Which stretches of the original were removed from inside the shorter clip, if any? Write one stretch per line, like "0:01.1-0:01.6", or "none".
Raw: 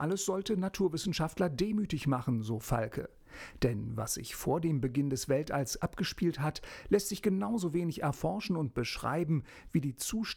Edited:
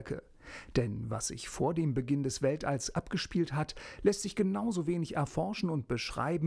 none